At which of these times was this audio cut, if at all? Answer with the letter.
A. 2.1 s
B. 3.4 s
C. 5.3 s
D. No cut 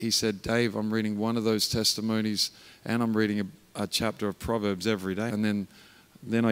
C